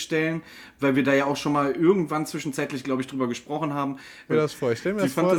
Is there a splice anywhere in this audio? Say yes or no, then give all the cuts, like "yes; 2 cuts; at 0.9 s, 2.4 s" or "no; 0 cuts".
yes; 1 cut; at 4.3 s